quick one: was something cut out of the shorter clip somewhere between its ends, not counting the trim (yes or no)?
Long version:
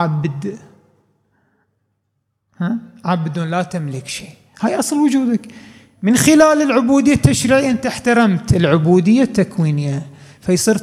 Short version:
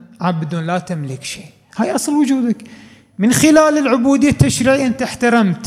no